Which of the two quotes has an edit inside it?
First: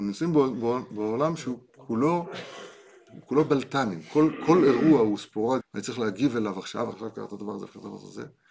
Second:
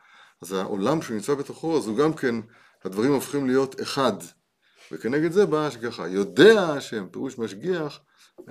first; 2 cuts; at 5.6 s, 6.9 s

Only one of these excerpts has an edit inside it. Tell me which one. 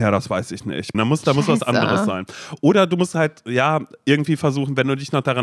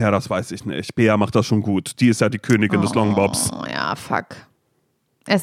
first; 1 cut; at 0.9 s

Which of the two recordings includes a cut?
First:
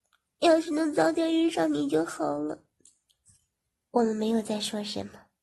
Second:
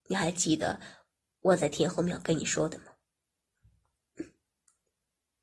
first; 1 cut; at 2.7 s

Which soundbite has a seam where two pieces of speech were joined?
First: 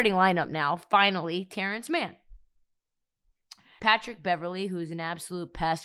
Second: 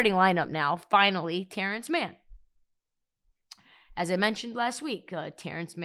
first; 1 cut; at 3.8 s

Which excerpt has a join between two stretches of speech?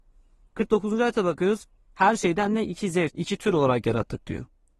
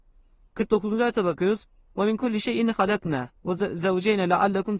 first; 2 cuts; at 1.8 s, 3.1 s

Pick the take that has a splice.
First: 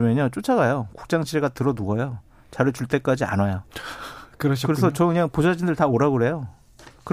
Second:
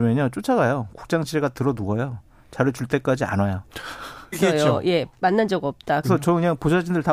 second; 2 cuts; at 4.3 s, 6.0 s

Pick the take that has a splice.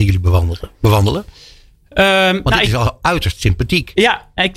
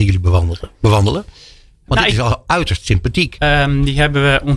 second; 2 cuts; at 1.9 s, 3.4 s

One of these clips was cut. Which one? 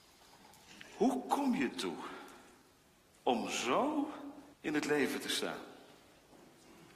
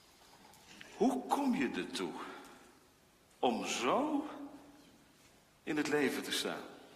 first; 2 cuts; at 1.7 s, 4.5 s

